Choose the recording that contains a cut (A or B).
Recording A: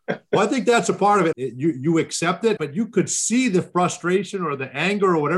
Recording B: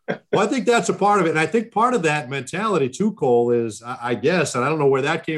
A